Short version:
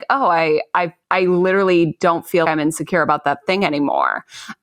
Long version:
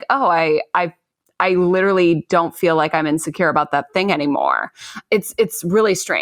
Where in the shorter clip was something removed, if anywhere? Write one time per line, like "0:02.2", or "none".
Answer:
0:01.0
0:02.4